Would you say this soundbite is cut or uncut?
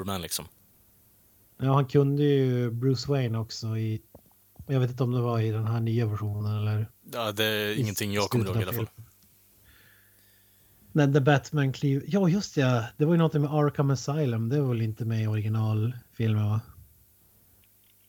uncut